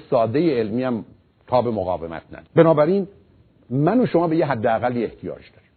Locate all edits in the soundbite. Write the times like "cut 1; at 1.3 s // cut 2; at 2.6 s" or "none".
cut 1; at 2.5 s